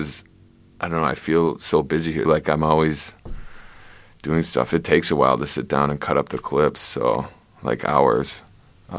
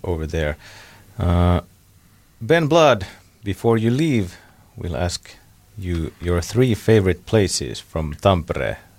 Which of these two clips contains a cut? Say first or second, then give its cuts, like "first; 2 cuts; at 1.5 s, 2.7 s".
first; 1 cut; at 2.3 s